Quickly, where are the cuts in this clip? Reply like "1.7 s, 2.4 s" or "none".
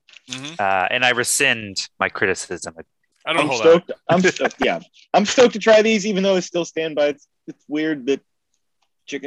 none

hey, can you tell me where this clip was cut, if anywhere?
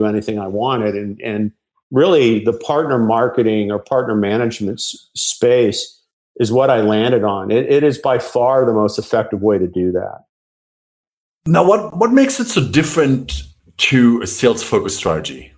none

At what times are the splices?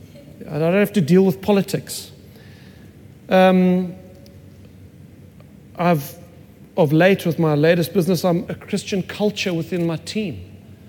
8.5 s

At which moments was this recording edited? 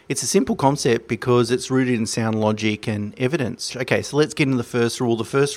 3.7 s

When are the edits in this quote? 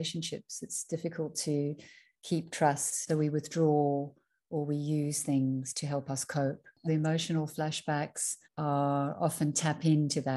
6.9 s, 8.4 s

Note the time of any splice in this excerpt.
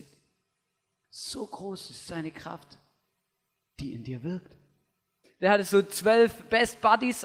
1.0 s, 5.2 s

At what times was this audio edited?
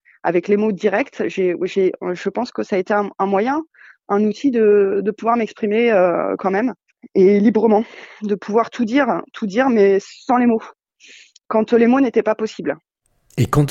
none

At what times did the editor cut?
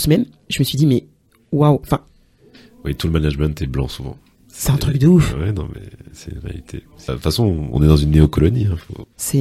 7.1 s

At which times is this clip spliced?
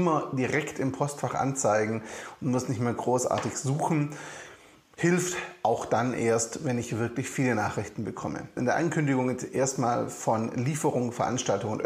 8.6 s

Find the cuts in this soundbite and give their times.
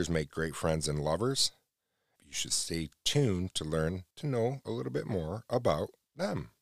2.2 s, 4.1 s

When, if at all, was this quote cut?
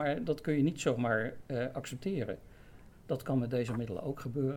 2.9 s

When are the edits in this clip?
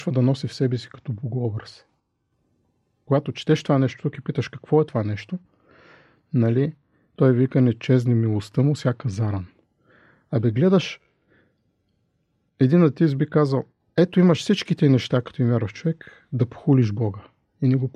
none

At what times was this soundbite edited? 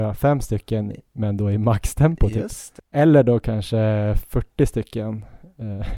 2.8 s

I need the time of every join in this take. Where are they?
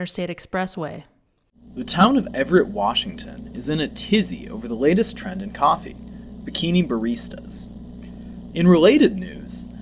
8.5 s

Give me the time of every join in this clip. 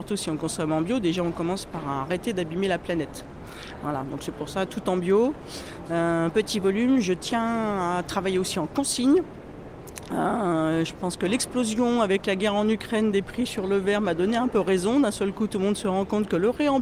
4.7 s

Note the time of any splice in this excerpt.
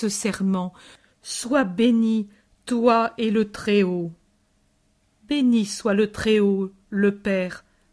none

